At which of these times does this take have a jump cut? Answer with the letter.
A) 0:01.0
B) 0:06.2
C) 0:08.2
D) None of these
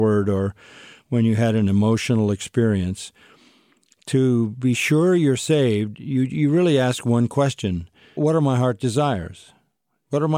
C